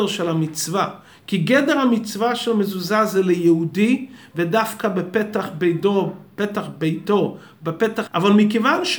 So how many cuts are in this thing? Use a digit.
1